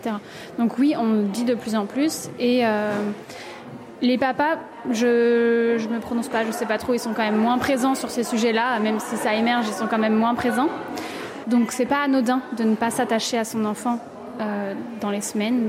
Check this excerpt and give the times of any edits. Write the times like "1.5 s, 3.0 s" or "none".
11.4 s